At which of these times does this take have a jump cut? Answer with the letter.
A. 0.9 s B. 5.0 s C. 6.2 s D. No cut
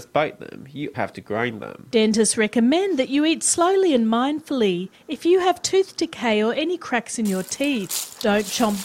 A